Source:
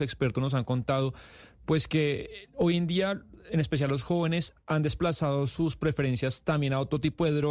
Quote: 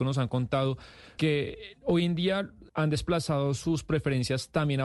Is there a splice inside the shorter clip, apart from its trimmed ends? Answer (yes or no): yes